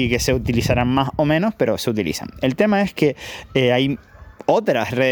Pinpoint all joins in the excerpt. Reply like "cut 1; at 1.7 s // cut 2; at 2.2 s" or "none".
none

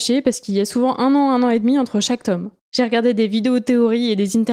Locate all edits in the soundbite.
cut 1; at 2.6 s

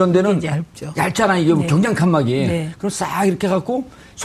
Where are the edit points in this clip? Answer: none

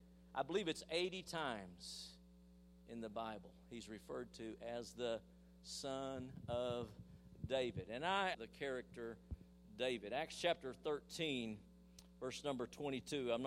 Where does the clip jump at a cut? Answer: cut 1; at 8.3 s

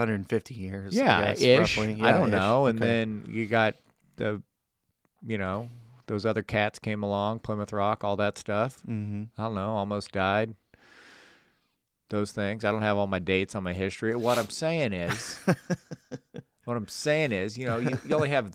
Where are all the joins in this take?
none

